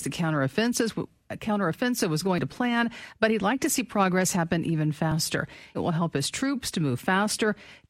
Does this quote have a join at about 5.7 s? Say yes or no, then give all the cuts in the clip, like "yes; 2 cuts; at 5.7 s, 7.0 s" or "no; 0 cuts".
yes; 1 cut; at 5.7 s